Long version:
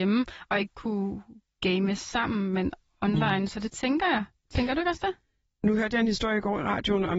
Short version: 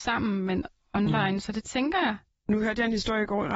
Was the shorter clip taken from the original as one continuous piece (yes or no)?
no